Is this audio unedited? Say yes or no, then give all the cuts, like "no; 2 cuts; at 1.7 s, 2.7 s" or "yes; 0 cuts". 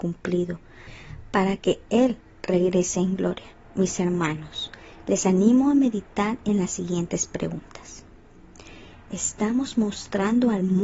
no; 1 cut; at 8.9 s